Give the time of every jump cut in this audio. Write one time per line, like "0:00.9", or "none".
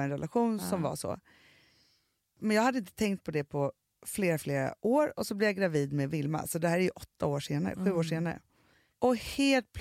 none